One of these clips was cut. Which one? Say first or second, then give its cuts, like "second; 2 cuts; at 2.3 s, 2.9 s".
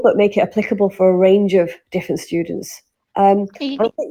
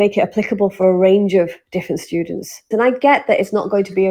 second; 1 cut; at 2.7 s